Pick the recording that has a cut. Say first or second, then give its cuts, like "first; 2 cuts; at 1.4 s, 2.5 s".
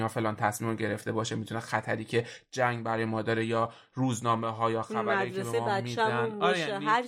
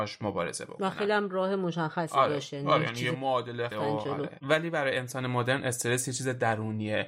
second; 1 cut; at 3.7 s